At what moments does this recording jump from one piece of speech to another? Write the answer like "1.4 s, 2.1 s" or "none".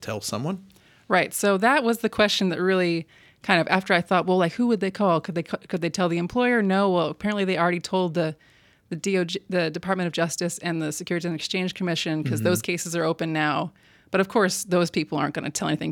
none